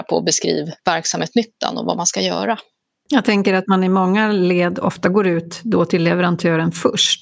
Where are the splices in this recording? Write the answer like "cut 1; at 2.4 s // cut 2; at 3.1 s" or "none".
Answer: none